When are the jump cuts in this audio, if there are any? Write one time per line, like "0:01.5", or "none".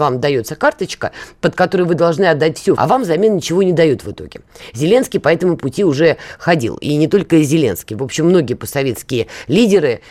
0:02.8